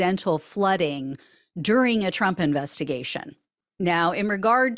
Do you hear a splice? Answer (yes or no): no